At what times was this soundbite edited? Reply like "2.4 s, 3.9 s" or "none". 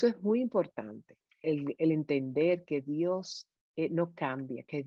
1.4 s